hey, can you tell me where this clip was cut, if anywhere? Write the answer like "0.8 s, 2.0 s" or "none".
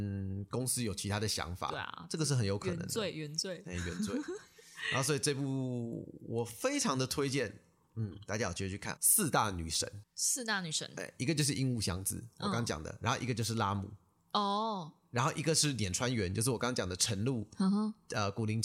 9.0 s